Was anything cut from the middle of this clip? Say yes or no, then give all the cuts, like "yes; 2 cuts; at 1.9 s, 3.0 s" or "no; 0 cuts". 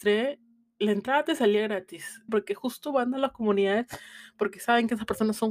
yes; 1 cut; at 2.3 s